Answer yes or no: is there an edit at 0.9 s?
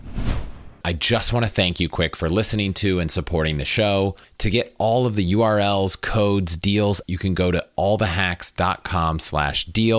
no